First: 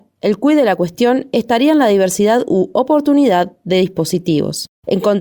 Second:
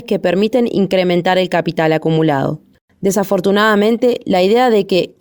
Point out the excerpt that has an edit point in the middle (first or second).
second